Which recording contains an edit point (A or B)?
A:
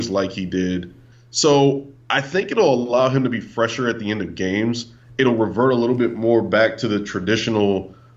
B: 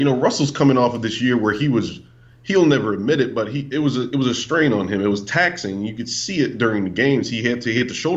A